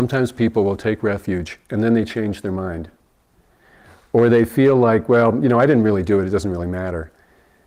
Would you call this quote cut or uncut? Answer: uncut